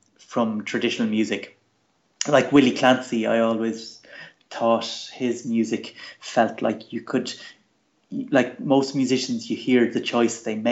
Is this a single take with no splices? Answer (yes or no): yes